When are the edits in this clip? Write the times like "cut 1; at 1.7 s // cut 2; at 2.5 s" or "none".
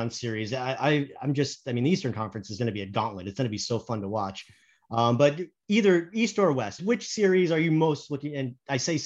cut 1; at 6.8 s